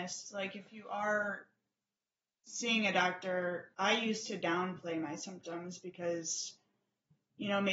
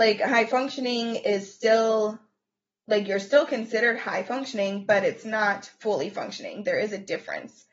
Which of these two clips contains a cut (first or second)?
first